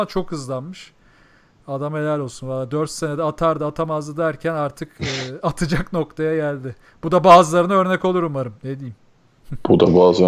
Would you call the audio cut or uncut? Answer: uncut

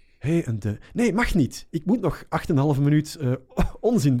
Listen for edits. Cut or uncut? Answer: uncut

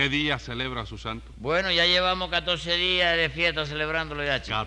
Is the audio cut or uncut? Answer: uncut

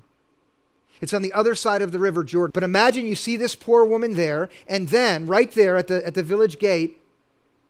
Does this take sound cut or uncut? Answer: cut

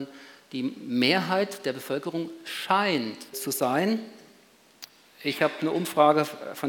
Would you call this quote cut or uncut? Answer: cut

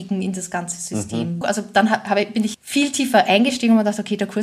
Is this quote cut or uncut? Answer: cut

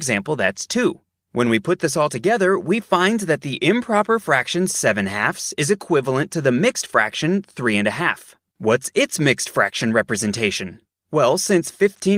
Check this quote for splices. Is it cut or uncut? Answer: cut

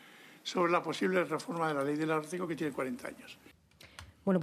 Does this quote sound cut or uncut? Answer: uncut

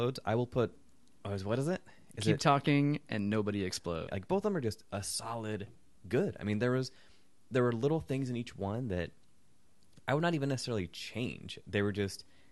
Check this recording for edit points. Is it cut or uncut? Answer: cut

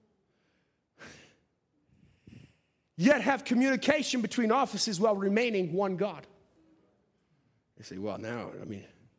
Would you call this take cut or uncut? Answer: uncut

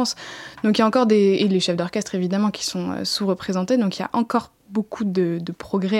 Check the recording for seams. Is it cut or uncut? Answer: uncut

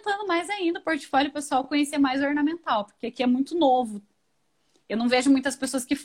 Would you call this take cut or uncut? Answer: uncut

